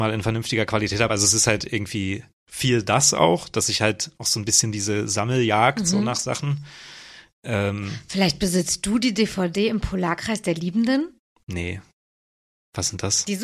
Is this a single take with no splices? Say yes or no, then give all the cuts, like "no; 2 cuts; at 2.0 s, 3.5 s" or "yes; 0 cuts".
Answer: yes; 0 cuts